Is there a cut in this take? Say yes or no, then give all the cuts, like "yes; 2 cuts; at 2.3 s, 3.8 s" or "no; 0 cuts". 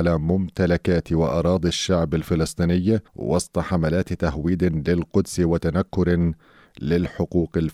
yes; 1 cut; at 3.1 s